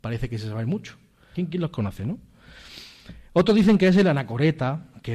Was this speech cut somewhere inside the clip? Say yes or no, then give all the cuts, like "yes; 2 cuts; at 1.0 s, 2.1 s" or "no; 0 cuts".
yes; 1 cut; at 1.3 s